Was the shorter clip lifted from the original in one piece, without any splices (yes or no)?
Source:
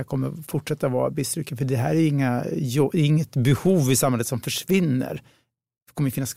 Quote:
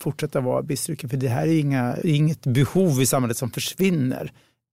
no